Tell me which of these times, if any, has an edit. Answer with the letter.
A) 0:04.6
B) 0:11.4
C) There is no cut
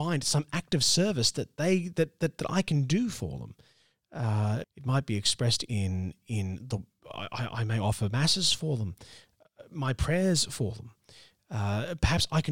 A